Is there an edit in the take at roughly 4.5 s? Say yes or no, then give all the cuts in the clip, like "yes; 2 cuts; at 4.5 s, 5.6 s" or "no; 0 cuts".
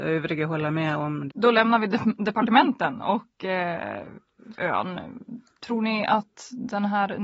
yes; 2 cuts; at 1.3 s, 4.5 s